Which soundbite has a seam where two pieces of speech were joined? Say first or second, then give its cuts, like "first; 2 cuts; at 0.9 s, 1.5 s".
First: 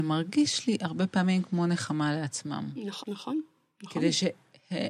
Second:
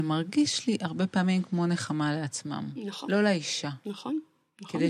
first; 1 cut; at 3.0 s